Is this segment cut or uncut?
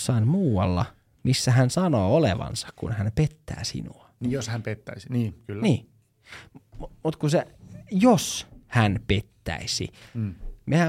uncut